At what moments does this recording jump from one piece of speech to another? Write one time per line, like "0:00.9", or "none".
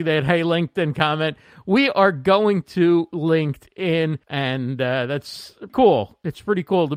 0:04.2
0:05.7